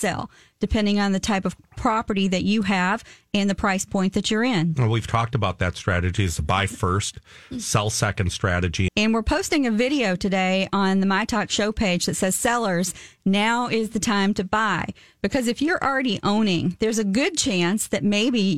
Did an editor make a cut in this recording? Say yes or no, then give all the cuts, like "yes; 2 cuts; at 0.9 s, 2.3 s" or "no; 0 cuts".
yes; 1 cut; at 8.9 s